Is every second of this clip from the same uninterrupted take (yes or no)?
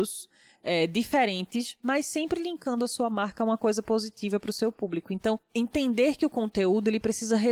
yes